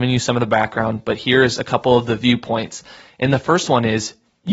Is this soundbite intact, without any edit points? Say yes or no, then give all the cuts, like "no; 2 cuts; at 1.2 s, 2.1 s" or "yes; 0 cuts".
yes; 0 cuts